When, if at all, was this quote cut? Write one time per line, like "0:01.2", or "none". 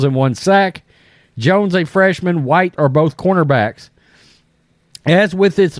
0:02.8